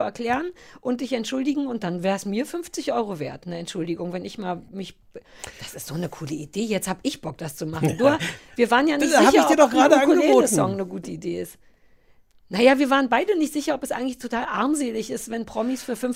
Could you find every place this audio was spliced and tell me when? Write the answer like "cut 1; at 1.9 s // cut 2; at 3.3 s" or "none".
none